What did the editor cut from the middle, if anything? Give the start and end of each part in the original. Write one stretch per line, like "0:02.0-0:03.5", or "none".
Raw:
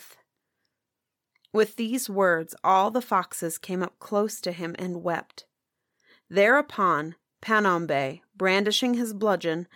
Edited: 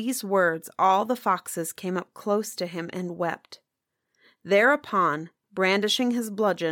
0:07.3-0:08.3